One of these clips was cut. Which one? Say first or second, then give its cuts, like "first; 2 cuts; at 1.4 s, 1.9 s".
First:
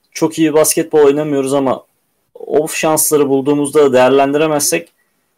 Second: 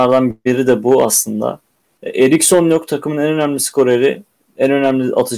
second; 1 cut; at 2.0 s